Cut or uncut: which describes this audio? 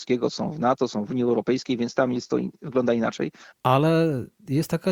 cut